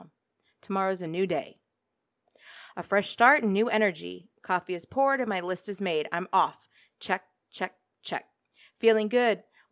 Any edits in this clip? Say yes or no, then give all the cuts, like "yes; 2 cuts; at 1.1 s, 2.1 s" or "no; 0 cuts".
no; 0 cuts